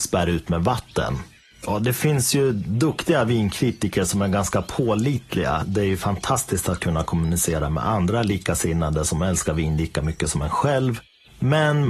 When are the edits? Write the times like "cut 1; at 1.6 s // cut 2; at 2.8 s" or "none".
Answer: cut 1; at 5.6 s